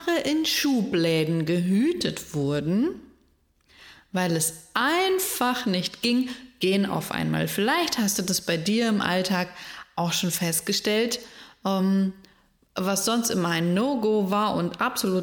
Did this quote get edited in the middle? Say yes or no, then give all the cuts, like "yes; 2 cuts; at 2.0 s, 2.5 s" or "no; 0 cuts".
no; 0 cuts